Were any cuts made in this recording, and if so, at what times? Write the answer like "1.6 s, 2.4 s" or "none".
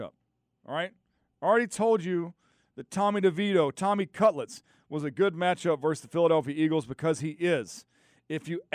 none